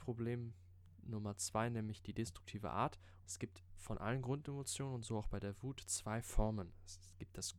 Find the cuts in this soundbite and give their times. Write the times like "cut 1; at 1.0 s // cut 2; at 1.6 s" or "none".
cut 1; at 3.2 s